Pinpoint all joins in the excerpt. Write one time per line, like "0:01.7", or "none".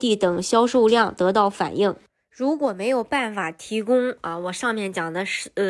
none